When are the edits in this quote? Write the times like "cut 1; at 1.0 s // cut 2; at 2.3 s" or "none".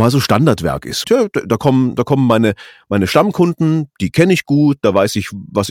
cut 1; at 1.0 s